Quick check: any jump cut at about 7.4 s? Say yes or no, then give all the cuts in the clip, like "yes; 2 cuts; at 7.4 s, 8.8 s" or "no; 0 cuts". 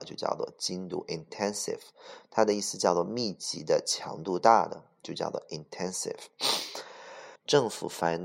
yes; 1 cut; at 7.4 s